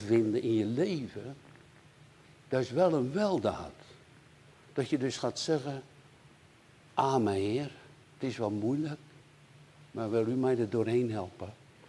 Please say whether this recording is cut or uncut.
uncut